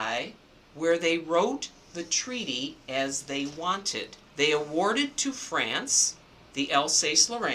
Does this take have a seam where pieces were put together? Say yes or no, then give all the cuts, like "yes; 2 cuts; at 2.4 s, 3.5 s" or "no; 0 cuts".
yes; 1 cut; at 4.3 s